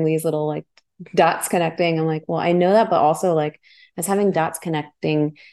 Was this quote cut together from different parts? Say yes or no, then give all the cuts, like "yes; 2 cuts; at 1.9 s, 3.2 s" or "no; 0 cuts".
no; 0 cuts